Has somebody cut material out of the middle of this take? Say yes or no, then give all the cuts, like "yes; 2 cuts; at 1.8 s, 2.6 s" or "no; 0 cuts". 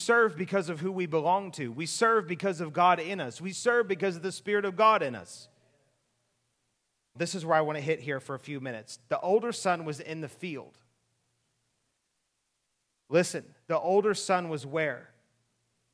yes; 1 cut; at 7.1 s